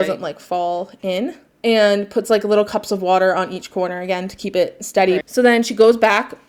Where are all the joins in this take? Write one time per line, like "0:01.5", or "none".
0:05.2